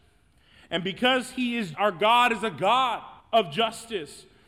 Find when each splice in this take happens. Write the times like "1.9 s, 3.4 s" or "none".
1.7 s, 3.2 s